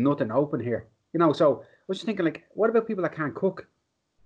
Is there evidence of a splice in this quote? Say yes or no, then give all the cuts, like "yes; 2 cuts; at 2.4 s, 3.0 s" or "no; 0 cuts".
no; 0 cuts